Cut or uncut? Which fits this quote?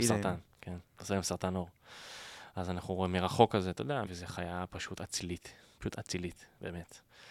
cut